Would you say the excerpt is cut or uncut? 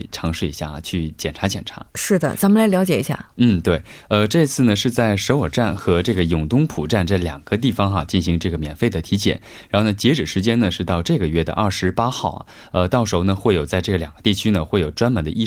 uncut